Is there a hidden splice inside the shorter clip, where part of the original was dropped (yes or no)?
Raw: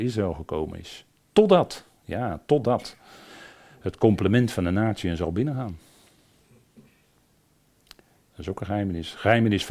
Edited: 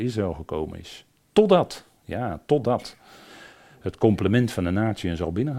no